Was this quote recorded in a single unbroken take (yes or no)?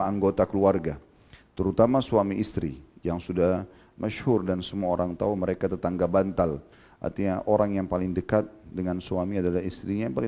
yes